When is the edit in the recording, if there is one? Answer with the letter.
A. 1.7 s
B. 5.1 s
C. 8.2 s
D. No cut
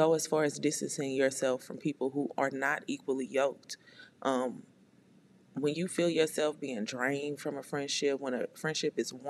D